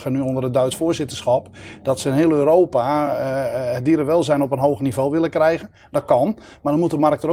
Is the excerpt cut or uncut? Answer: uncut